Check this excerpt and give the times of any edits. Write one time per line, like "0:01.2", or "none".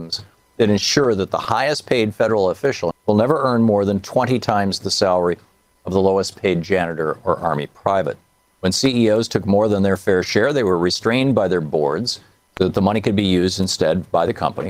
0:02.9
0:08.5